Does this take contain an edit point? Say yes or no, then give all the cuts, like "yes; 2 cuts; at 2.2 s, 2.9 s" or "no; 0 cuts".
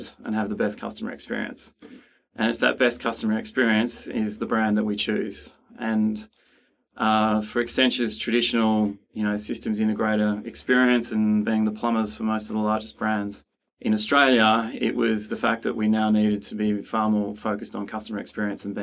no; 0 cuts